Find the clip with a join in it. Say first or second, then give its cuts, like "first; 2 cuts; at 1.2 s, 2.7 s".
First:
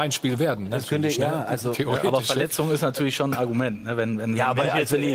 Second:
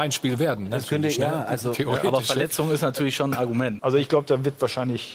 second; 1 cut; at 3.8 s